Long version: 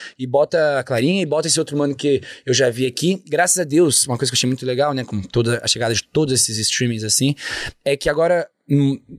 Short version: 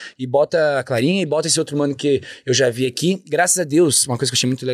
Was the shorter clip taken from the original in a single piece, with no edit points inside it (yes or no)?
yes